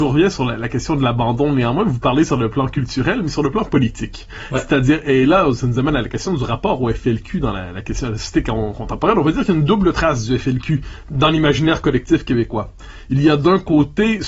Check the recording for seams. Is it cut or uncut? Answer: uncut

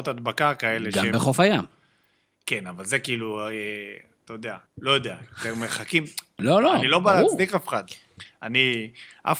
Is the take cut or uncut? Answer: cut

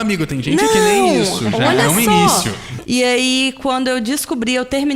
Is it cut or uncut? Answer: cut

